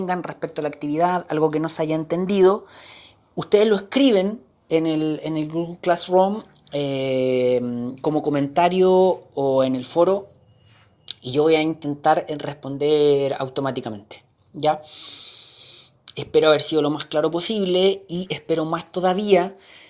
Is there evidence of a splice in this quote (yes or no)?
no